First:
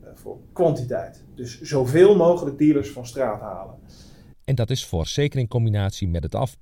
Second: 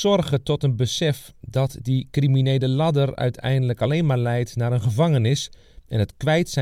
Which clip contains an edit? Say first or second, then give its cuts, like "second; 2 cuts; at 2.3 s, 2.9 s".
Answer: first; 1 cut; at 4.3 s